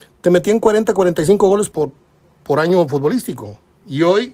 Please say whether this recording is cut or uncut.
cut